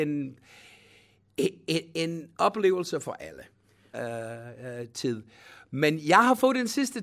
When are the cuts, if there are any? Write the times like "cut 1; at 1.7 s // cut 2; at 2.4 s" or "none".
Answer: cut 1; at 3.9 s

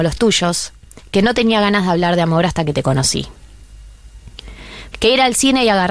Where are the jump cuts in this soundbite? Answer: cut 1; at 4.9 s

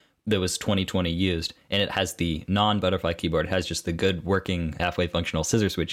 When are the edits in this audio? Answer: cut 1; at 4.8 s

